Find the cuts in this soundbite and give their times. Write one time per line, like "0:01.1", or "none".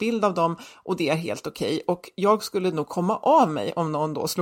none